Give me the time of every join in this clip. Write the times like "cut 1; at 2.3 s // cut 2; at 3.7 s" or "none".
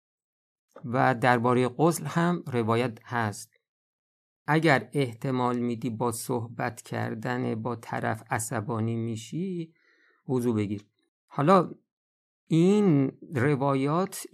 none